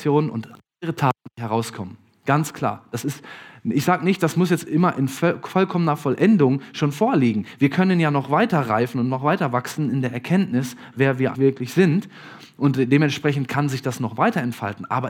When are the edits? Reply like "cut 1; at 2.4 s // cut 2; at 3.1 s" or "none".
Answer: cut 1; at 11.3 s